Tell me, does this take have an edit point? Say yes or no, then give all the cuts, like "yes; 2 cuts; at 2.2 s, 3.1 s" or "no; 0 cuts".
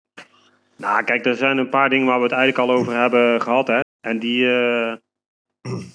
yes; 1 cut; at 3.8 s